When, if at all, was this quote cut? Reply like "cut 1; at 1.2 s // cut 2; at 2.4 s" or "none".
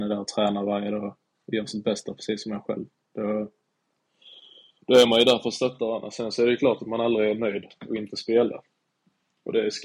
none